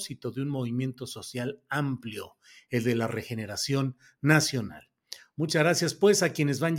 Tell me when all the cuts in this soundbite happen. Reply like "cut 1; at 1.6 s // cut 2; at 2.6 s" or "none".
none